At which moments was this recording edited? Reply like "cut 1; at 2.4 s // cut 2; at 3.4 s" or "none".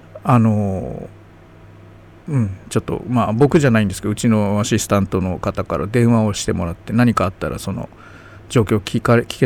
none